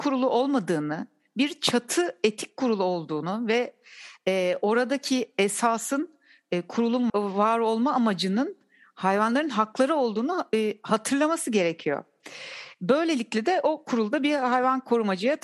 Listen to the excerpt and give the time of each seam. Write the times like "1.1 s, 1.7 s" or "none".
7.1 s